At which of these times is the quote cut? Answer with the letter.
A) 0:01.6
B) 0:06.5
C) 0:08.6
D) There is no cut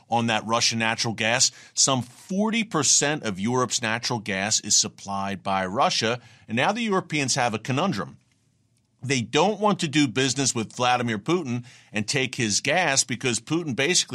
D